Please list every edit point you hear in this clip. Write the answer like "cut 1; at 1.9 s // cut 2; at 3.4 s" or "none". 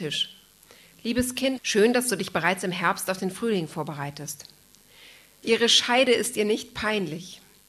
cut 1; at 1.6 s // cut 2; at 5.4 s